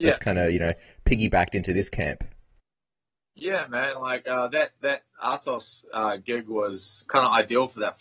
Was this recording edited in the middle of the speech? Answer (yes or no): no